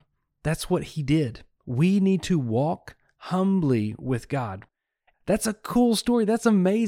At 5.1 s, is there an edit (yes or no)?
yes